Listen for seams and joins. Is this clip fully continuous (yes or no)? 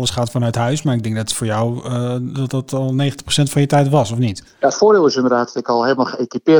yes